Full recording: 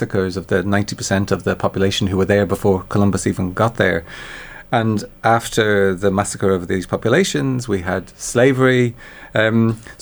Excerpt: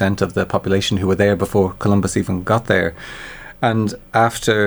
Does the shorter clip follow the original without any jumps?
yes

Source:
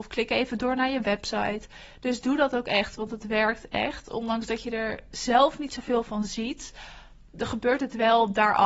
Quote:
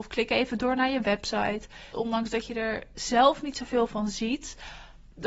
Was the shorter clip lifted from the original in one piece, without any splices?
no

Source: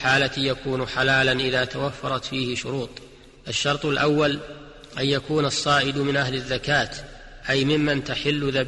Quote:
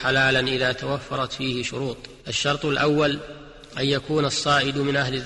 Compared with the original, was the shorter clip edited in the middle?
yes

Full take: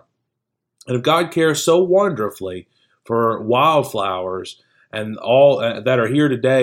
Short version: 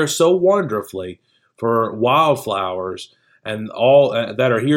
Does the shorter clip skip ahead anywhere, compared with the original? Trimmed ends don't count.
no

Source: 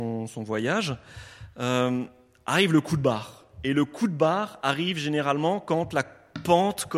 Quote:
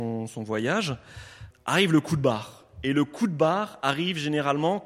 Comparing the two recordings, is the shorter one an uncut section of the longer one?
no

